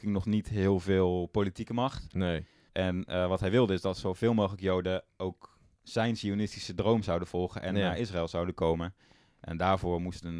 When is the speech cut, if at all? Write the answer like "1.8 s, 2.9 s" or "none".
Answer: 2.7 s